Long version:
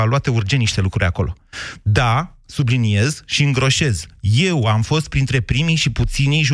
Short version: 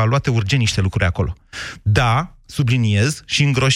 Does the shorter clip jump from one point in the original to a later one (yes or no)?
no